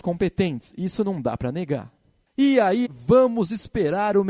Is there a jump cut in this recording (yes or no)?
yes